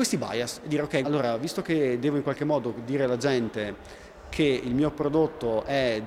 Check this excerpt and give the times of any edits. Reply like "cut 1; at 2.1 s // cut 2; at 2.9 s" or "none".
cut 1; at 1.0 s